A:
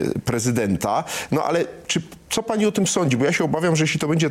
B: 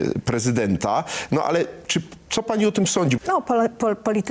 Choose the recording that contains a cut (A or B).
B